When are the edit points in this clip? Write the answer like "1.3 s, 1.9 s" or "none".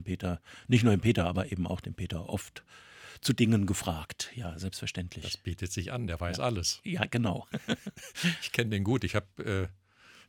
none